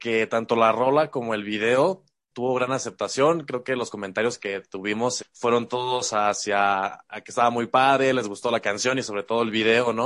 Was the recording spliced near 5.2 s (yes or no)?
yes